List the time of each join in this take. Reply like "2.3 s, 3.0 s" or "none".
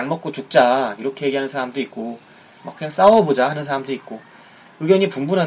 1.0 s, 2.6 s